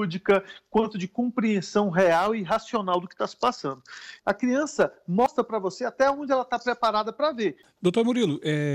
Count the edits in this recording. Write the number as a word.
two